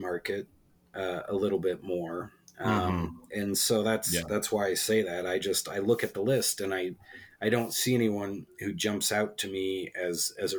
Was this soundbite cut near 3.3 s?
no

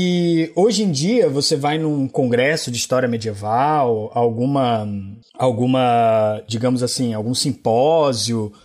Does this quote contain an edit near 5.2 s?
no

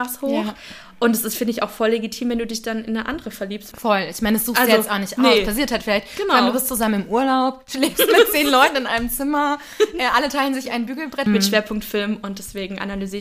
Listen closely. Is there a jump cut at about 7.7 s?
no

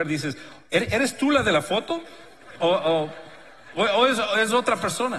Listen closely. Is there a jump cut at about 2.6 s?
no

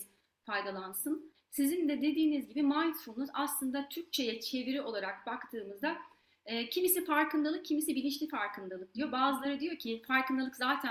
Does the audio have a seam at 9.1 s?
no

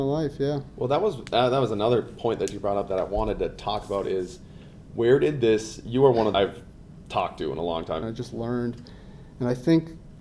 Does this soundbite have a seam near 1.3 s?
no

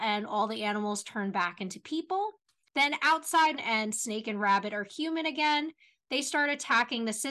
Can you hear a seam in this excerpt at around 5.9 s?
no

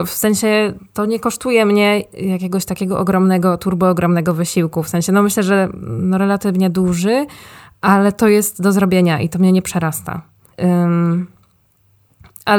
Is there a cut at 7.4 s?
no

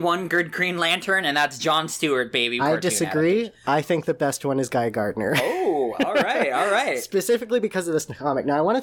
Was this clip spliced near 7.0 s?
no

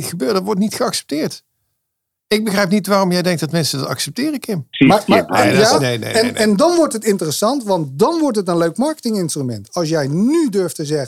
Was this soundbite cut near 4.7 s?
yes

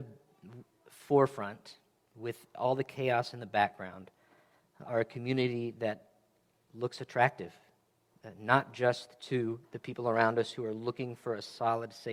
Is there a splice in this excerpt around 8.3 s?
no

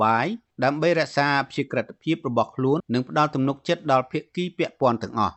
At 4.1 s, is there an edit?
no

